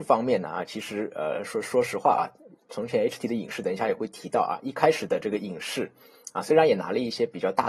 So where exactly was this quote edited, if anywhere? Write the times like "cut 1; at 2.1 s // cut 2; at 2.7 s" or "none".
none